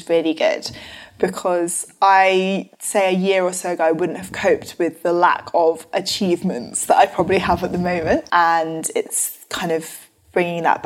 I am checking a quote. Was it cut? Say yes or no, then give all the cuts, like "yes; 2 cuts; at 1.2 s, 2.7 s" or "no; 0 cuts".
yes; 1 cut; at 8.3 s